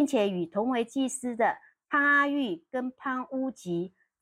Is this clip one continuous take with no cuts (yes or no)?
yes